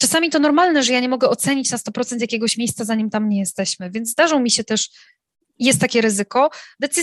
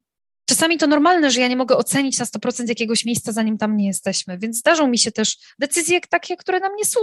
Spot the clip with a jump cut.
second; 1 cut; at 5.5 s

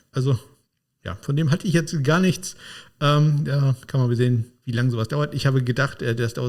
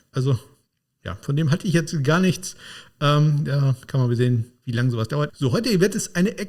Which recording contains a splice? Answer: second; 1 cut; at 5.3 s

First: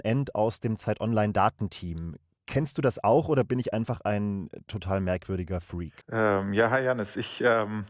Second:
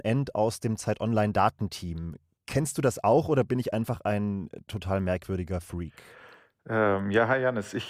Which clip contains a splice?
first; 1 cut; at 6.0 s

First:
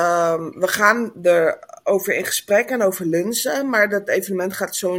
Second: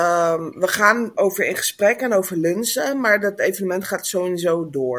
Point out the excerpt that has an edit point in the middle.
second; 1 cut; at 1.1 s

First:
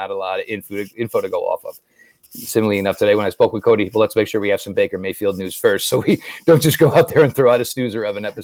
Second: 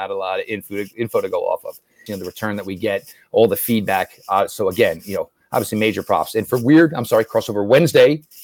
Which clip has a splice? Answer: second; 1 cut; at 2.1 s

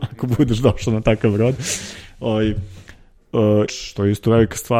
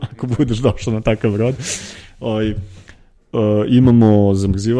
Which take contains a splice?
first; 1 cut; at 3.7 s

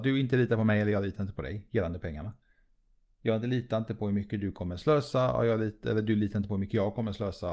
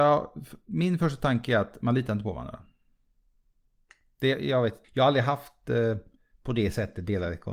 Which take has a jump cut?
second; 1 cut; at 4.8 s

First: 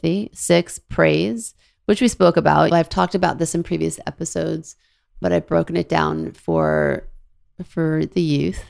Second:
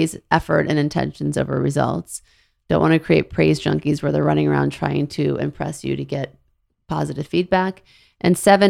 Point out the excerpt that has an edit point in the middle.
first; 2 cuts; at 2.7 s, 5.2 s

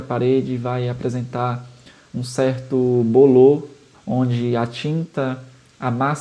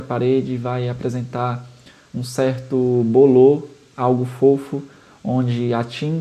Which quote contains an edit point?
first; 1 cut; at 3.9 s

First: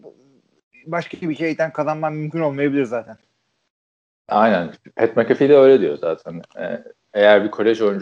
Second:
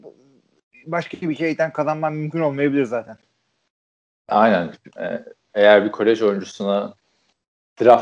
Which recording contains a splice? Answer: second; 1 cut; at 4.9 s

